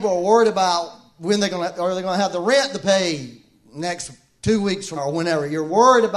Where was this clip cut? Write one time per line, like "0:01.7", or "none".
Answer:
0:05.0